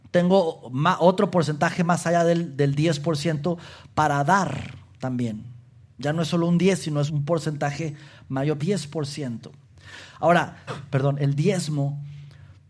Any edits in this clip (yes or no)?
yes